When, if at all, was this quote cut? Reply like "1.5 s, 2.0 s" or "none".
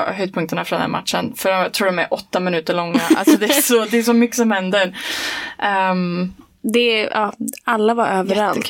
none